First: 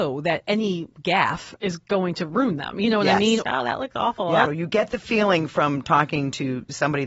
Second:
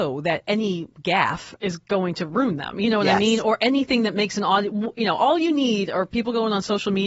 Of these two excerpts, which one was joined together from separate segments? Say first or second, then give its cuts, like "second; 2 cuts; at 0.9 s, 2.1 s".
first; 2 cuts; at 3.4 s, 4.5 s